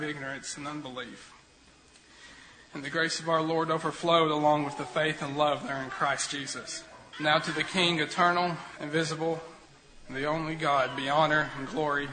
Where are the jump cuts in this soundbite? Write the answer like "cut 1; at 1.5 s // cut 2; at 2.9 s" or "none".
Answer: cut 1; at 7.1 s // cut 2; at 8.8 s